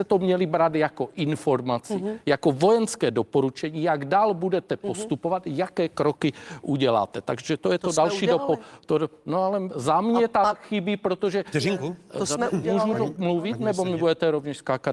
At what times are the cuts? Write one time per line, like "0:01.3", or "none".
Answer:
none